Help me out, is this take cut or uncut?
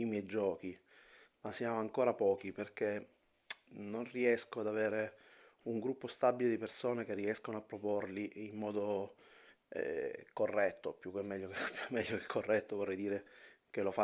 uncut